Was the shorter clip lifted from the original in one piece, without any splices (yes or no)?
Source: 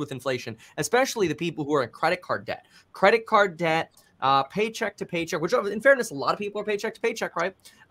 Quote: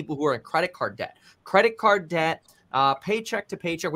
yes